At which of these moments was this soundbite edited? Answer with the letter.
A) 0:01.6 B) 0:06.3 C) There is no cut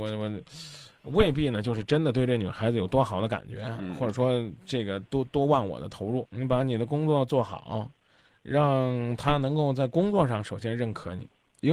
C